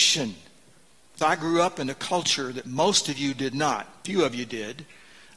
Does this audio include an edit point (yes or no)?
yes